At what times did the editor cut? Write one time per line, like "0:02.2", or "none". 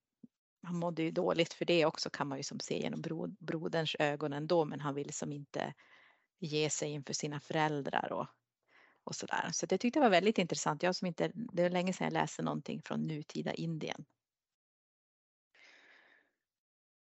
none